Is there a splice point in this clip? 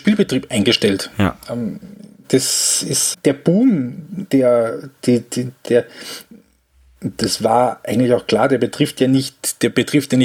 yes; 2 cuts; at 3.1 s, 5.7 s

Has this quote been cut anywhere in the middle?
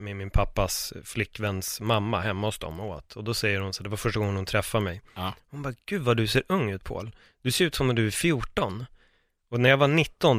no; 0 cuts

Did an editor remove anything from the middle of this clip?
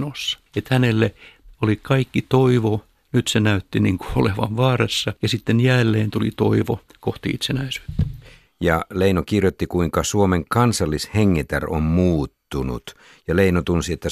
yes; 1 cut; at 8.5 s

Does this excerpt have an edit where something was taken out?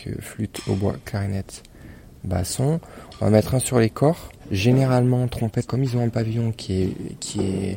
yes; 2 cuts; at 4.4 s, 5.7 s

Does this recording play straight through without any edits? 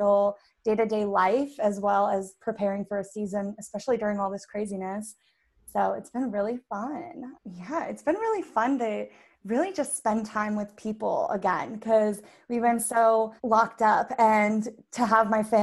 no; 2 cuts; at 7.3 s, 13.4 s

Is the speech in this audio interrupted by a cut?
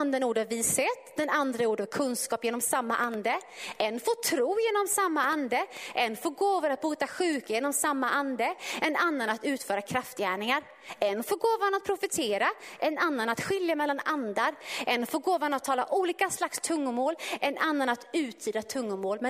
no; 0 cuts

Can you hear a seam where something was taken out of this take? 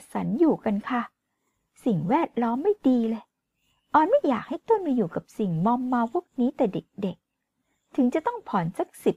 no; 0 cuts

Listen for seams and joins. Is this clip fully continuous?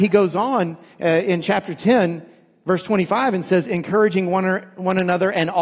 yes; 0 cuts

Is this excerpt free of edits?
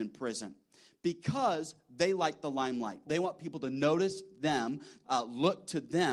no; 2 cuts; at 3.1 s, 5.0 s

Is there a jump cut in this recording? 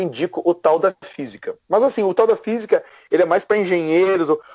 no; 0 cuts

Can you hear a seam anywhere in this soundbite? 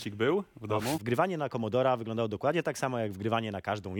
yes; 1 cut; at 1.0 s

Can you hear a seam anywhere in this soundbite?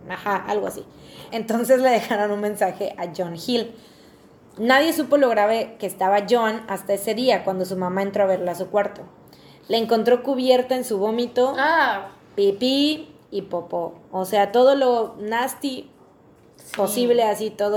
yes; 1 cut; at 1.3 s

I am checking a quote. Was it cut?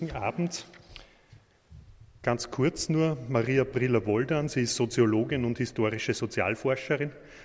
no; 0 cuts

